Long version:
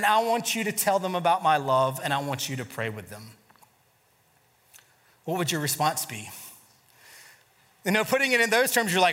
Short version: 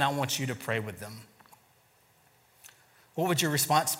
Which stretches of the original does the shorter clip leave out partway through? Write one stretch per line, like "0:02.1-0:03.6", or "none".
none